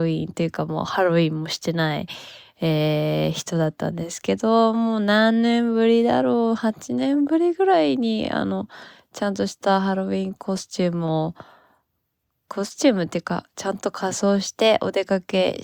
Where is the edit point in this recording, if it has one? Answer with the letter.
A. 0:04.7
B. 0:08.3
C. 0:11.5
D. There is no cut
D